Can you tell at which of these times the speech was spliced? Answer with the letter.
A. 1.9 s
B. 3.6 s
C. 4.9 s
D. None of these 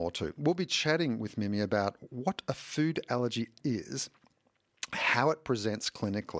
B